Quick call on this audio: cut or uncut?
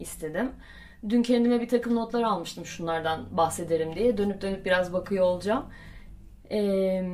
uncut